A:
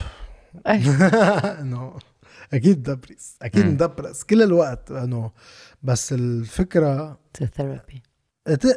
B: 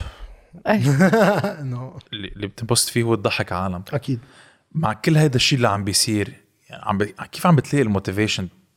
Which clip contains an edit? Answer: B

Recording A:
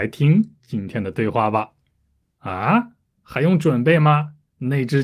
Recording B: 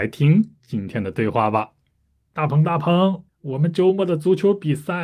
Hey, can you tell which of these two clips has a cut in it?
A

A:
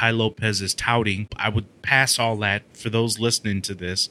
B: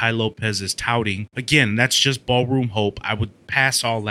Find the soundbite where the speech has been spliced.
A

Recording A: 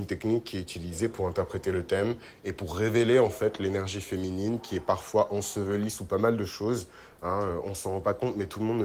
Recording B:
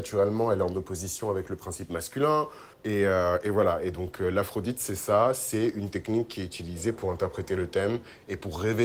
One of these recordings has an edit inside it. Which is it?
B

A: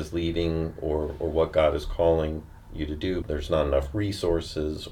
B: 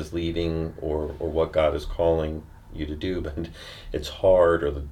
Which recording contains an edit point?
A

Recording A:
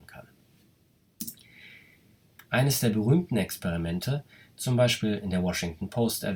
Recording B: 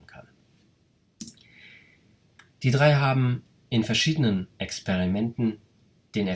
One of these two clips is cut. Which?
A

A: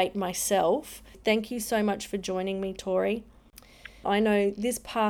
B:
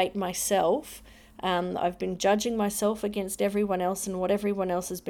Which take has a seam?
A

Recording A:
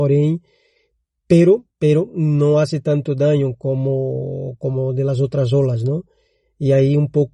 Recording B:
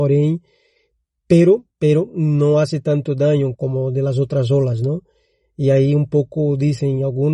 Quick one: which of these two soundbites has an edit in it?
B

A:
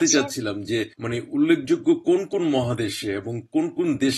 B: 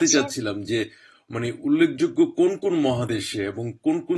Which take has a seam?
A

